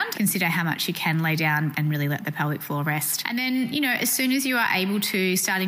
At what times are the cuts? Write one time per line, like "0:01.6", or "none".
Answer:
0:01.7